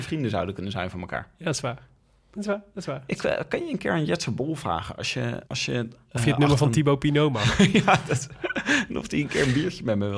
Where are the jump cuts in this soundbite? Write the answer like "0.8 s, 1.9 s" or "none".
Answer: 5.5 s